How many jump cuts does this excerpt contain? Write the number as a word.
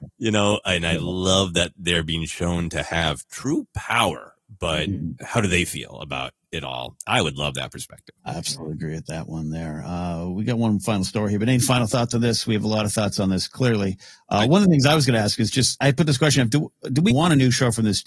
three